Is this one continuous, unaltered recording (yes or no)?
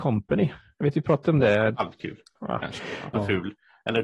no